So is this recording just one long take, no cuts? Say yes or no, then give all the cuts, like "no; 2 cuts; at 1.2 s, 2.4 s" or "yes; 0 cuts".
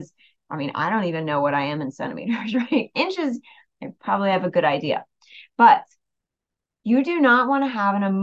yes; 0 cuts